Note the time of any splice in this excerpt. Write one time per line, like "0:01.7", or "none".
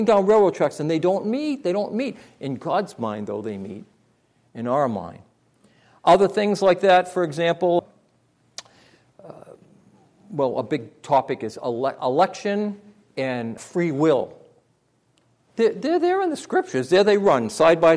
0:07.8
0:13.6